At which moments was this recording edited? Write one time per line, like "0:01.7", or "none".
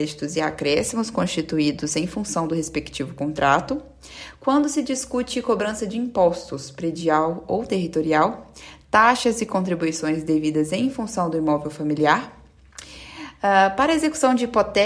0:04.3